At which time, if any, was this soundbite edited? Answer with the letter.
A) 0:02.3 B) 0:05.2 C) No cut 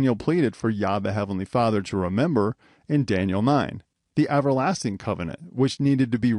C